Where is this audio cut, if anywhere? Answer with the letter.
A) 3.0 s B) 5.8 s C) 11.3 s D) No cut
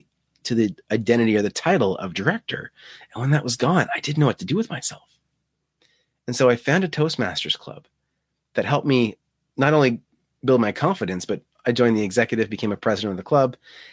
D